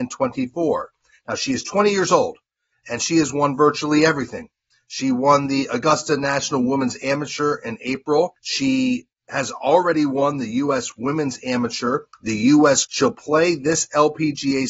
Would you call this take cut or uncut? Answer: cut